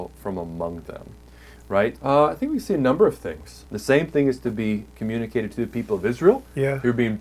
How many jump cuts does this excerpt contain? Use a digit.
2